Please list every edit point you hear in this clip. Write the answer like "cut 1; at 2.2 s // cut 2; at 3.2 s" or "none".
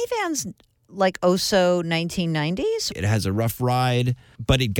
cut 1; at 2.9 s